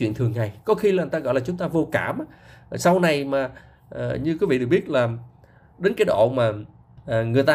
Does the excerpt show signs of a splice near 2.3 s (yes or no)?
no